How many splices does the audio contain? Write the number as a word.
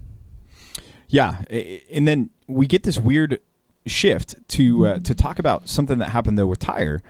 zero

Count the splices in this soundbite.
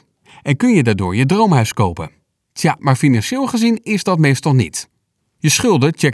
two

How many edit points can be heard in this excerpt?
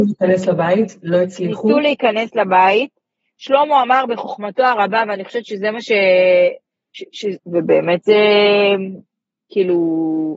one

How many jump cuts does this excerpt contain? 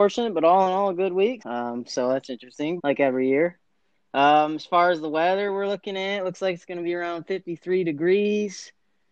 two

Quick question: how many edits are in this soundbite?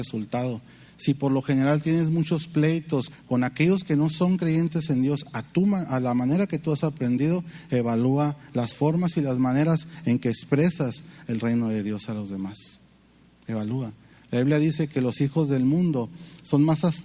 one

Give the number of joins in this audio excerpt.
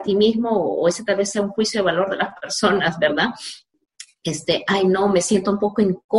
zero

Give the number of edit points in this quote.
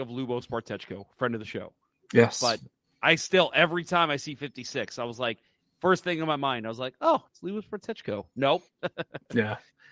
one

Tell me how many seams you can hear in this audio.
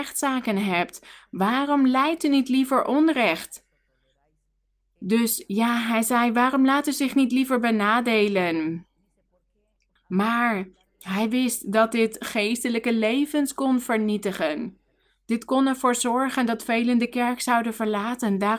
one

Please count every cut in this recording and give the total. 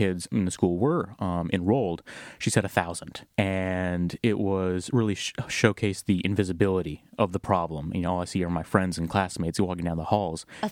one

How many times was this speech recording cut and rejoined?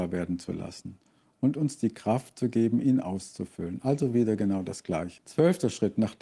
one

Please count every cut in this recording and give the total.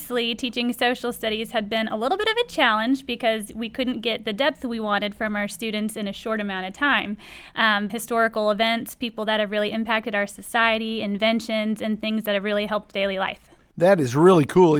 one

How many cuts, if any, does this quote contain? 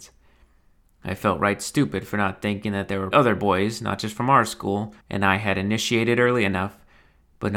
two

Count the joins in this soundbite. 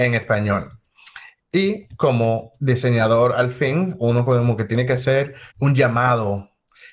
one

